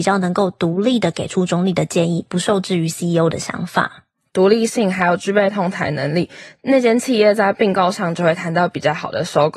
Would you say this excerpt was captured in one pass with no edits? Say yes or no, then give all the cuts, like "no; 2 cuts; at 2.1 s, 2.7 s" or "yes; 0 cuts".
no; 1 cut; at 4.3 s